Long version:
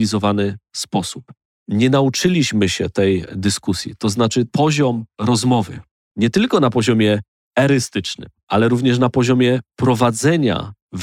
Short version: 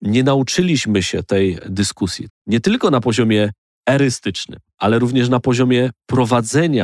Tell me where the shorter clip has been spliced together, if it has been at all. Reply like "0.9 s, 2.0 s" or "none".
2.3 s

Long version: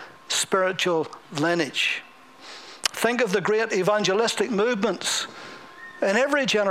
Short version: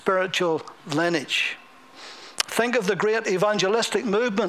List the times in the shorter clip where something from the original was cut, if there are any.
none

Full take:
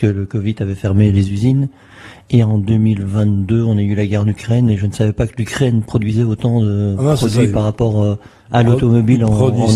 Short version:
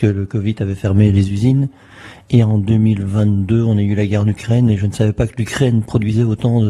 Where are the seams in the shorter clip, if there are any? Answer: none

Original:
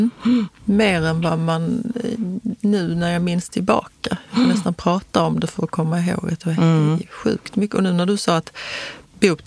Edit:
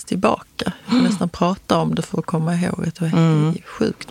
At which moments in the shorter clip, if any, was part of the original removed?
none

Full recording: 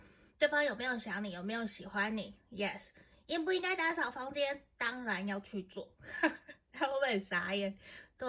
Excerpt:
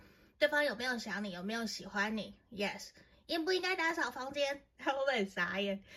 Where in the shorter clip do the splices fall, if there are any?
4.7 s

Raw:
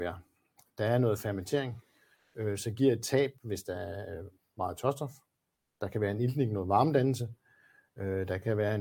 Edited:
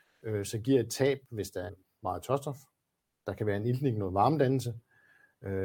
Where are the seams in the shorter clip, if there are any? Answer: 1.7 s

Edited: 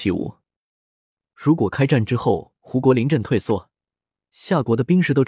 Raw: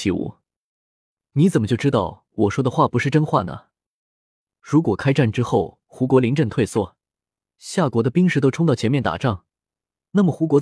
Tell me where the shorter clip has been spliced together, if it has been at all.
1.3 s

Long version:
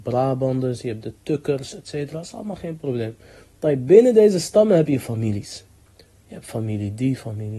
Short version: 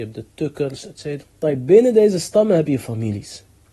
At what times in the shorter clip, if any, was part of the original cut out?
1.2 s

